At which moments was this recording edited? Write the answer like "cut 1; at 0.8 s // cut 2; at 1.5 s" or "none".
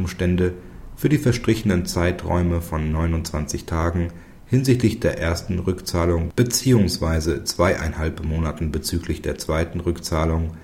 none